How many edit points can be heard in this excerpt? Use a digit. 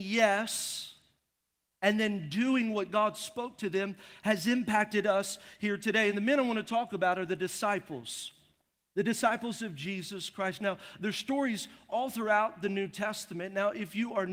0